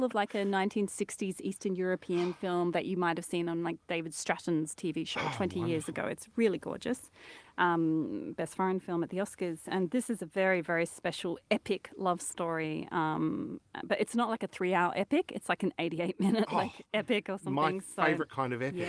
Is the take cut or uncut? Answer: cut